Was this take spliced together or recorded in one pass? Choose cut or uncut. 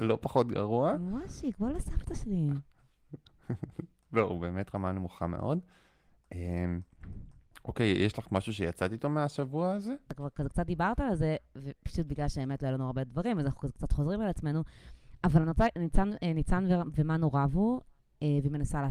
uncut